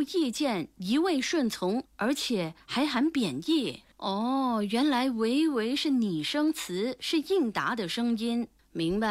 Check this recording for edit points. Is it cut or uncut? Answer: cut